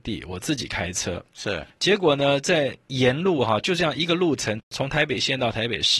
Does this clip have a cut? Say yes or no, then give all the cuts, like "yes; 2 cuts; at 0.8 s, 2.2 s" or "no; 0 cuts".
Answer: no; 0 cuts